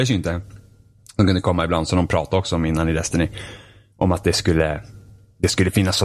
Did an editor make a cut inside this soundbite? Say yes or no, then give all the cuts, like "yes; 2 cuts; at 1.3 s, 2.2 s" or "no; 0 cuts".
yes; 1 cut; at 1.0 s